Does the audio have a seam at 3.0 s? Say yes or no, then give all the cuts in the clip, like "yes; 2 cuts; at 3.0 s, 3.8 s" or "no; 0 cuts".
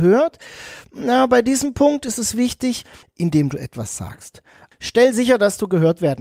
yes; 2 cuts; at 3.0 s, 4.7 s